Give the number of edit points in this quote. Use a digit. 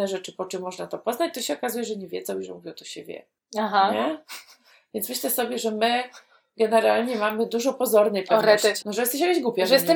1